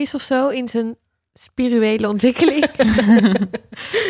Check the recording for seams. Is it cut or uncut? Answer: uncut